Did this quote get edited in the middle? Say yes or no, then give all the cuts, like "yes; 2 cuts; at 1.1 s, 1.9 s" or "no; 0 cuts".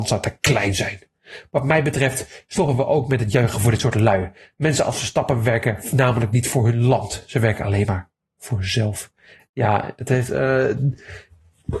no; 0 cuts